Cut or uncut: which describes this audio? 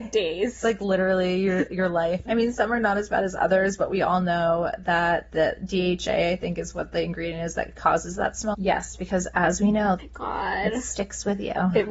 cut